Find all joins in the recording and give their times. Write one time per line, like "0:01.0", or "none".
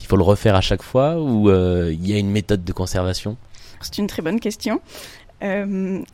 0:03.8